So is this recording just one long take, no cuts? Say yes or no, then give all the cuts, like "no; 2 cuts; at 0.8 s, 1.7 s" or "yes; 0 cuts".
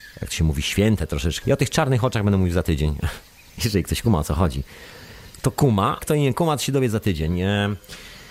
no; 2 cuts; at 1.4 s, 6.0 s